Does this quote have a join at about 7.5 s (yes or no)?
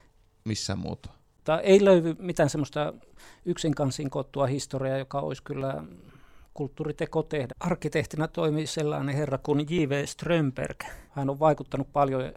yes